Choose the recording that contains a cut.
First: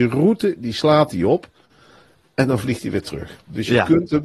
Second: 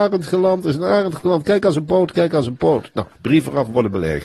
second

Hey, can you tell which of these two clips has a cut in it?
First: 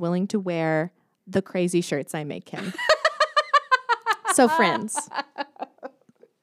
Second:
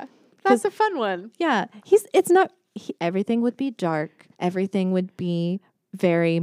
second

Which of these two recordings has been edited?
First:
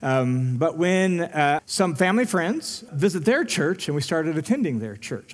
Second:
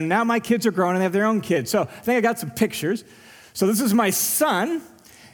first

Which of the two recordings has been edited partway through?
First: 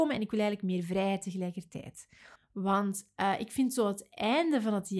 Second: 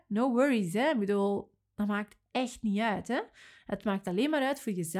first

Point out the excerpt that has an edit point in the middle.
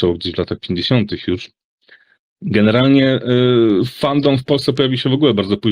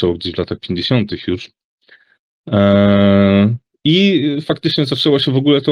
first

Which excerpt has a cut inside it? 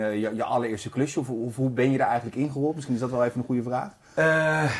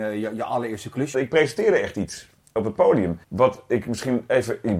second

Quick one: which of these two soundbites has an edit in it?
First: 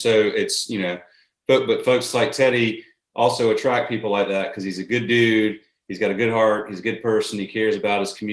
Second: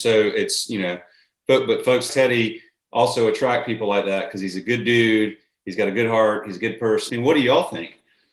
second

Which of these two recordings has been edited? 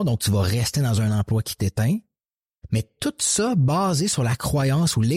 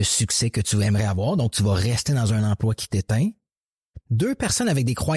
second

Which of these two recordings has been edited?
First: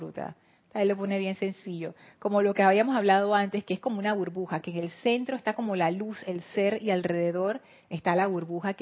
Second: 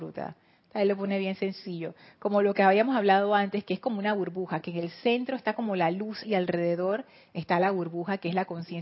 second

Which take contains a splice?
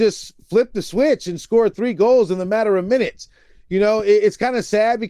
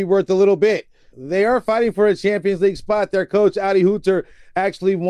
second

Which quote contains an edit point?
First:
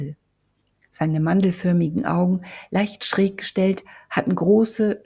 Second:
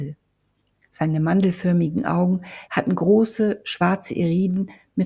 second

